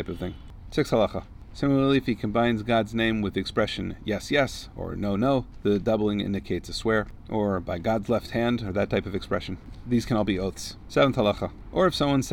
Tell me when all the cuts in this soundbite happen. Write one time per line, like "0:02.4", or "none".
none

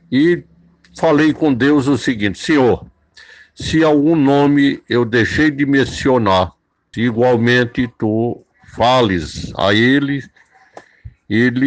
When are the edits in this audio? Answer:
0:06.9

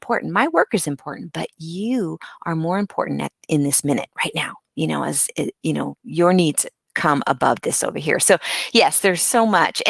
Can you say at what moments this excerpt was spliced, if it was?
none

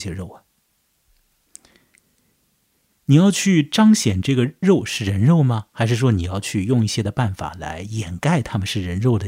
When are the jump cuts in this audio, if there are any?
none

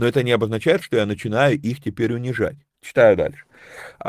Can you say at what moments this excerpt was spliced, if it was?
0:02.7

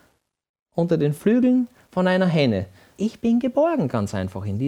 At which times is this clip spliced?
0:03.0

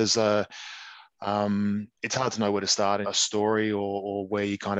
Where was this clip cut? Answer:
0:01.9
0:03.0

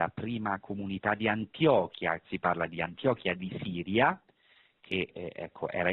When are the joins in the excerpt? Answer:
0:02.2

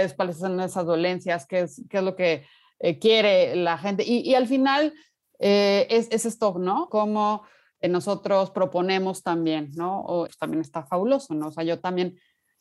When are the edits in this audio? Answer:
0:06.9
0:10.3

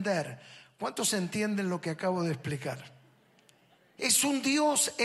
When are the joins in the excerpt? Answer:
0:04.0

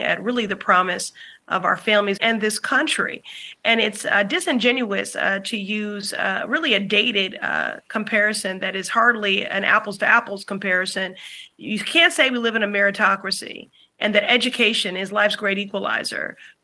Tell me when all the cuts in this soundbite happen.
0:02.2

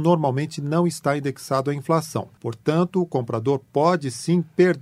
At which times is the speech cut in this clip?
none

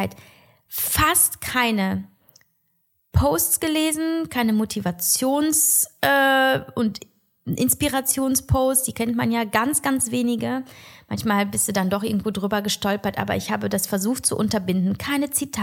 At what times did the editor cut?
none

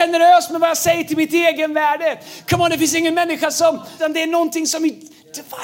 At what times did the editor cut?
0:04.0

